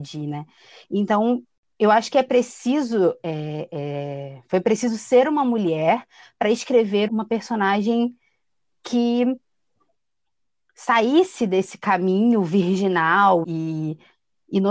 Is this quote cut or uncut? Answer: cut